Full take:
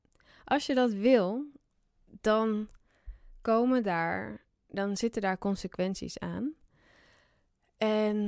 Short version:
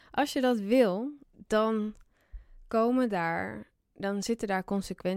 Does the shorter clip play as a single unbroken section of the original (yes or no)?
no